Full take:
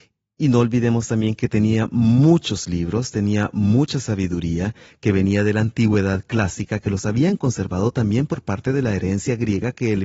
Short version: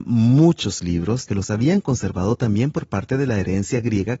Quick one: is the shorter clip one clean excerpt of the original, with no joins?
no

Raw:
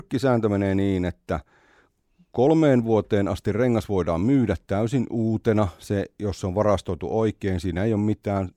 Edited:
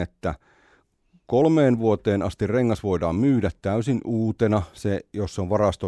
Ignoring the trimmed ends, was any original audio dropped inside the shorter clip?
no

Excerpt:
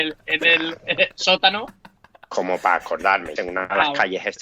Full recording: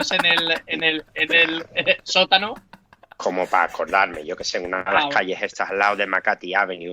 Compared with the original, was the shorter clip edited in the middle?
yes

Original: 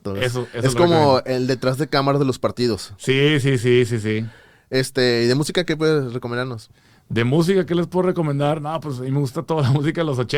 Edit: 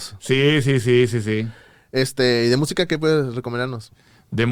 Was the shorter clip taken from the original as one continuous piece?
yes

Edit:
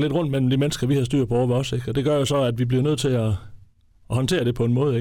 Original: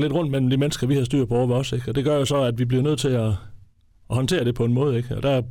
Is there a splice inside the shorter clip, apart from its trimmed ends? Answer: no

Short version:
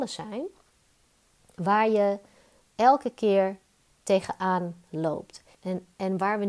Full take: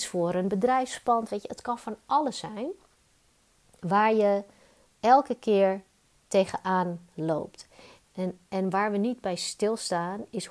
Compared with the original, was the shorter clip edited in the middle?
yes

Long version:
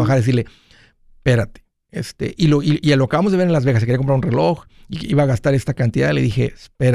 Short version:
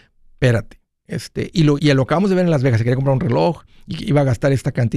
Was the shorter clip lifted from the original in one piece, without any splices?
no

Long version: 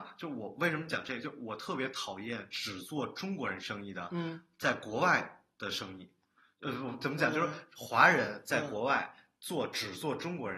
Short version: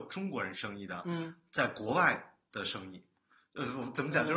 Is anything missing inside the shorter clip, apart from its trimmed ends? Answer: no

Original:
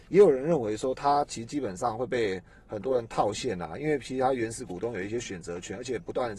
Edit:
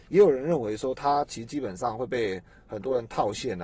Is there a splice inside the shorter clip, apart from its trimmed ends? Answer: no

